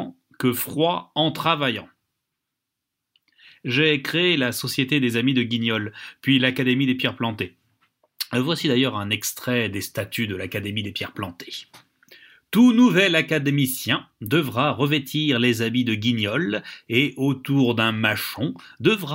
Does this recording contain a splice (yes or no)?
no